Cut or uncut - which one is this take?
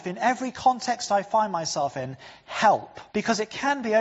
cut